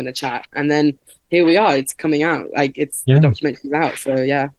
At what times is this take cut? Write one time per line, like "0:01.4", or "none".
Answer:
none

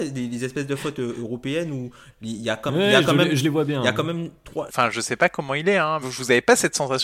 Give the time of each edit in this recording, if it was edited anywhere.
0:04.7
0:06.0

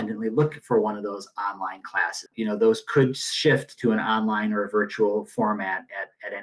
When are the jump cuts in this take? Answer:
0:02.3

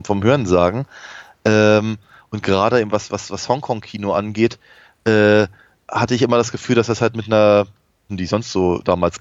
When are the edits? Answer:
0:08.1

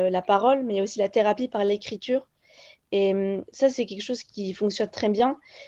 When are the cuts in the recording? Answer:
none

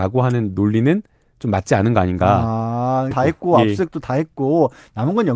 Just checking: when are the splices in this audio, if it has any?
0:03.1

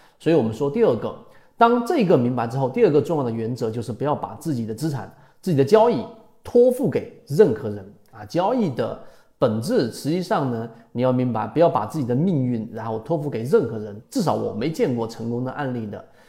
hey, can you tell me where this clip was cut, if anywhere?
0:14.0

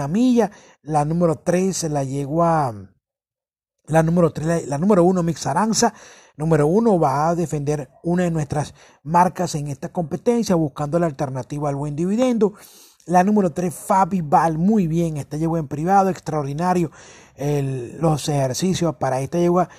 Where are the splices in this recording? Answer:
none

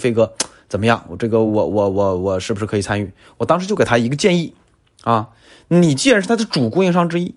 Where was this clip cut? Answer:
none

